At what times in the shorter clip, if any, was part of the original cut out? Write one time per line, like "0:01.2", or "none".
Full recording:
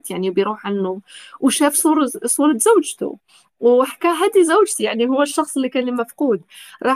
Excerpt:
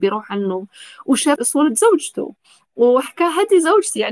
0:01.4